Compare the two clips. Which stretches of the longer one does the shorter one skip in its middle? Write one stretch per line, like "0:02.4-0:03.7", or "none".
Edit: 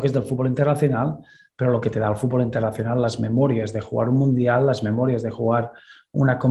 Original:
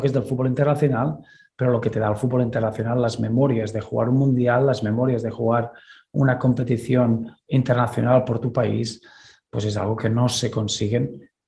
none